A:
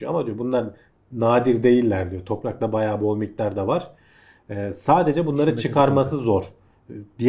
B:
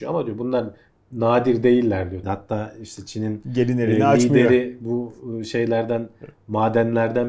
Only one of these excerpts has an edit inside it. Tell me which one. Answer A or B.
B